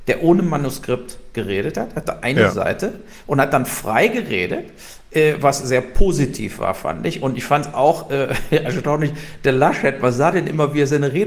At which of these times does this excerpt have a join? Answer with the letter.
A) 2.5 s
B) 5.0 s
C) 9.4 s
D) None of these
D